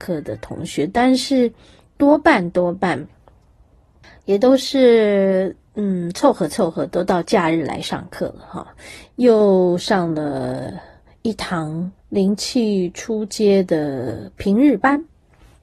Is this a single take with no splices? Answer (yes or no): no